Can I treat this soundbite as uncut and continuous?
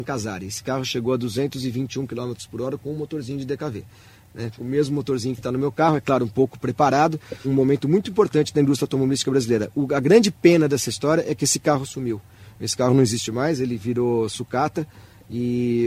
no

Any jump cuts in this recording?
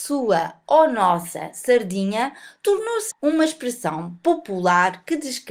yes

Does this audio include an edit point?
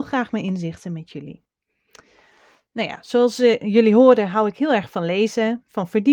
no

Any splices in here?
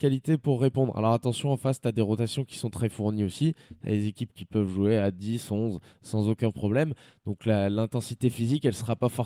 no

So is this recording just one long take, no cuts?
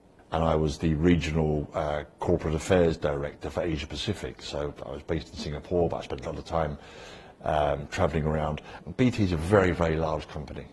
yes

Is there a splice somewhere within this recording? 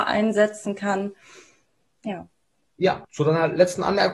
yes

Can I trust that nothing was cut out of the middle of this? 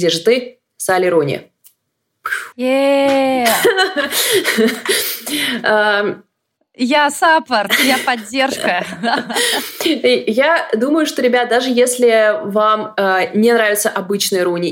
no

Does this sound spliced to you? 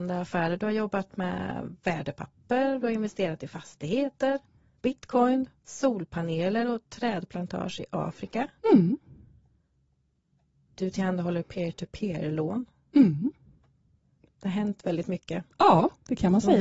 yes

